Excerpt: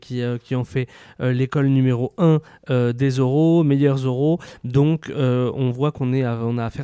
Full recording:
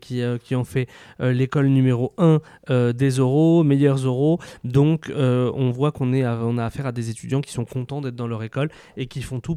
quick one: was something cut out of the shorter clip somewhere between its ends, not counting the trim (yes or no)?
no